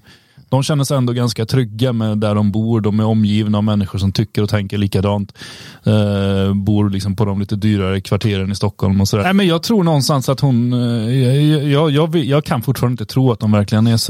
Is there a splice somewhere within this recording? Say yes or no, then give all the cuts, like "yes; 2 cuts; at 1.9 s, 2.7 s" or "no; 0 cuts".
yes; 1 cut; at 9.2 s